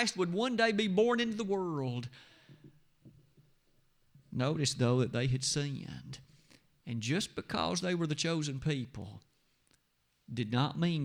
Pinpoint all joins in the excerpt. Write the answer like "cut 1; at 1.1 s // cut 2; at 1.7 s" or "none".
none